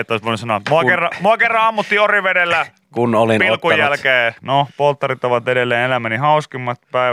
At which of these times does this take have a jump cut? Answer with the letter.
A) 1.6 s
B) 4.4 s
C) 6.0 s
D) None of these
B